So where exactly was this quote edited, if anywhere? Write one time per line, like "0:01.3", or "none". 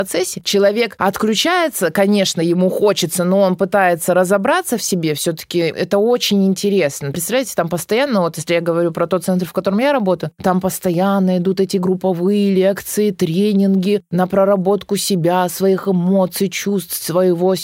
none